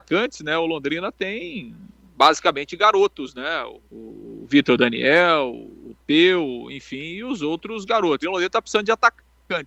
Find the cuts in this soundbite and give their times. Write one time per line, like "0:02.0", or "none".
0:03.8
0:08.2